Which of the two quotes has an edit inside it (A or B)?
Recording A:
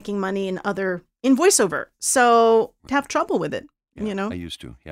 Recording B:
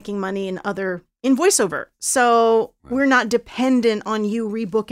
A